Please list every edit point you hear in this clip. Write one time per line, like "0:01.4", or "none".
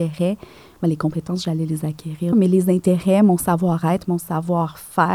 0:02.3